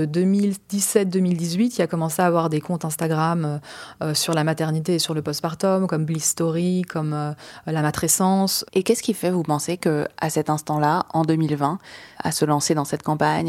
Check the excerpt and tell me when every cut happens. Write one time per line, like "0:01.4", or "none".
0:08.6
0:12.1